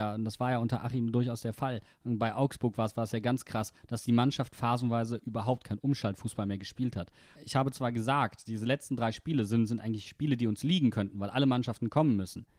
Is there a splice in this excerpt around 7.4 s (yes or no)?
yes